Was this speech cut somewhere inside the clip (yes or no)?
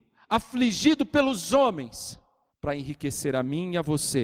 yes